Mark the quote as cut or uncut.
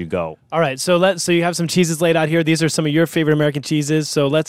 uncut